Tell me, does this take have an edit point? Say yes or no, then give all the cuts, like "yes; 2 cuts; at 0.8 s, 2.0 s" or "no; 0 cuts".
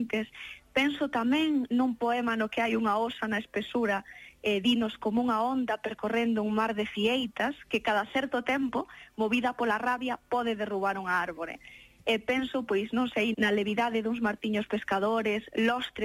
yes; 2 cuts; at 12.0 s, 13.3 s